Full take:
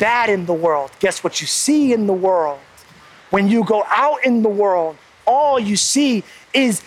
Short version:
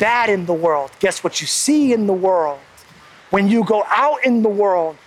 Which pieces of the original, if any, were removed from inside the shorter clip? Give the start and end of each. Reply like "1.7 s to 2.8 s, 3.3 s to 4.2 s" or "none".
none